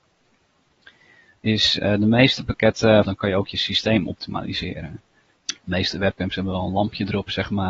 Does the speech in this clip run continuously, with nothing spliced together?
no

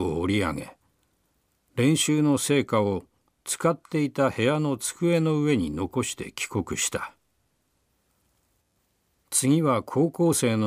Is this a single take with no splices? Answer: yes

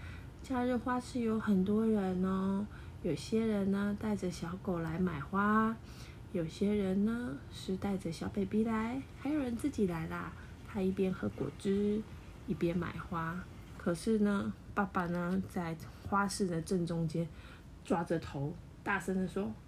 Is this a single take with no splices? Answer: no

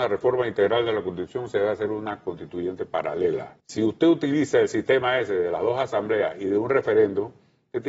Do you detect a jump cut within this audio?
yes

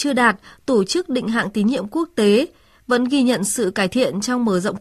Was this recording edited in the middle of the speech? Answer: no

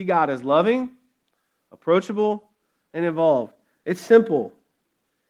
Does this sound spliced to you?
no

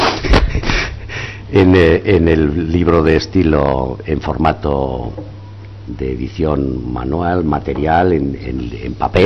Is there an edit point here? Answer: no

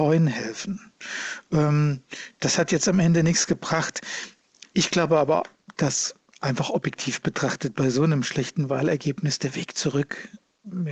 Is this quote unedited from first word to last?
yes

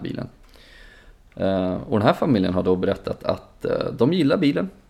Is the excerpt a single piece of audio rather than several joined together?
yes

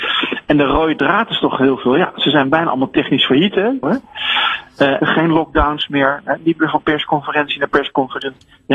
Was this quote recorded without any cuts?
no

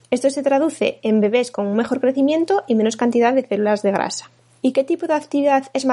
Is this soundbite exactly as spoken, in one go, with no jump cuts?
yes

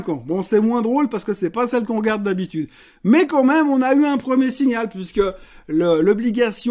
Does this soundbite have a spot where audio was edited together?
no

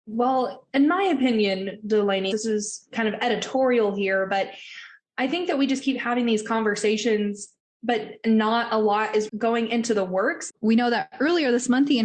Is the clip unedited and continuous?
no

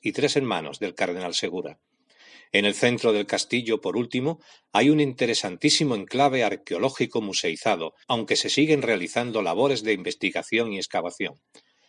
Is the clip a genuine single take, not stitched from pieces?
no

